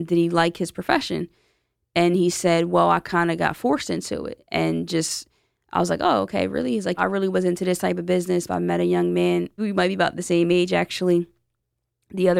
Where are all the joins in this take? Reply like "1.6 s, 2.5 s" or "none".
7.0 s, 8.5 s, 9.6 s